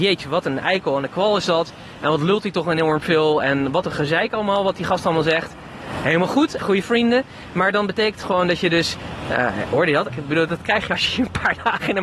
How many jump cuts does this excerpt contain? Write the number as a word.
two